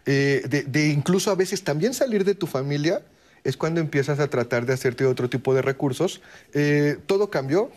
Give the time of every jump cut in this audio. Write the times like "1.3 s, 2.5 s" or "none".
6.4 s